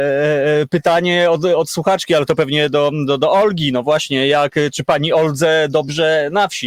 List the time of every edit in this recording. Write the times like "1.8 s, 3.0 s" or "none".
none